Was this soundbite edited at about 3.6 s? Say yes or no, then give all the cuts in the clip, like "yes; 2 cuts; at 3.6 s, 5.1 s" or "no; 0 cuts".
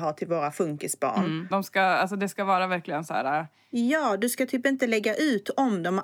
no; 1 cut; at 1.5 s